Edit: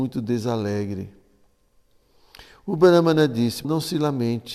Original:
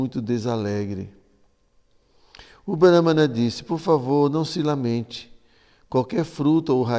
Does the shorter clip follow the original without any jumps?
no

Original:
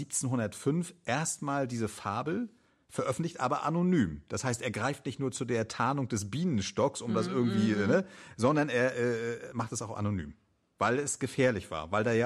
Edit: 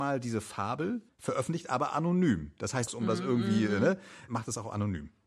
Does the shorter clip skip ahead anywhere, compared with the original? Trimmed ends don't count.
yes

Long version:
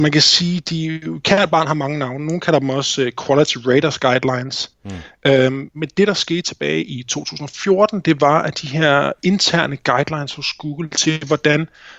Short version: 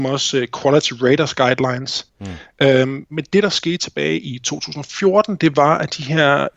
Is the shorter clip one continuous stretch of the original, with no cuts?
yes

